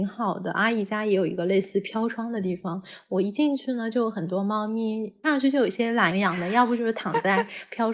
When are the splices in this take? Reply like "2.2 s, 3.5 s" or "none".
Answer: 6.1 s